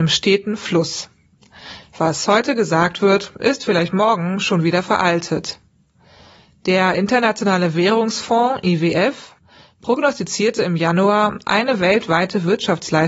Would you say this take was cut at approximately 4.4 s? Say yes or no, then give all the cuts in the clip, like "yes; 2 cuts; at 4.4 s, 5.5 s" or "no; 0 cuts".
no; 1 cut; at 1.8 s